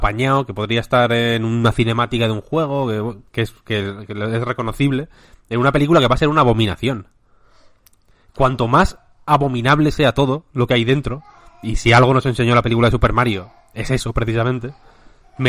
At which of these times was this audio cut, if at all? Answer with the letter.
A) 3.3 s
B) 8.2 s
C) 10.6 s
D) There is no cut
A